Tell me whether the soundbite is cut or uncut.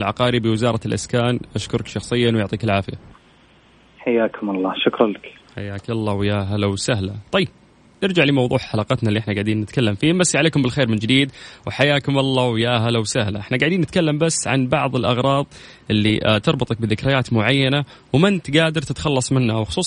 uncut